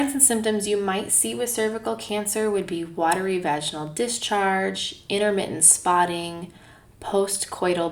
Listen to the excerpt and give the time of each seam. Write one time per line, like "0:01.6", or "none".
none

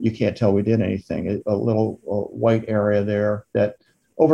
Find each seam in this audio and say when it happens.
0:01.4

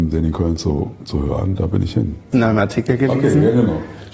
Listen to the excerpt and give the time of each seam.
0:02.3

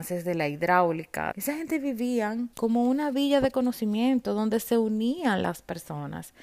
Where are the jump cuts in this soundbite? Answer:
0:01.3
0:02.5

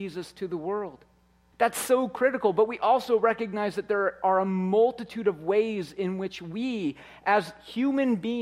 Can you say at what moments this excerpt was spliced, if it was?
0:01.5

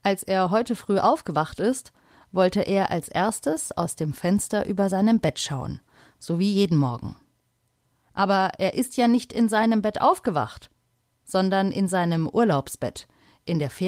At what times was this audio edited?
none

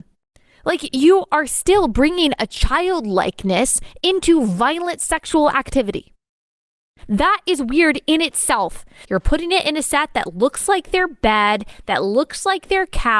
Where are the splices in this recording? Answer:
0:09.0

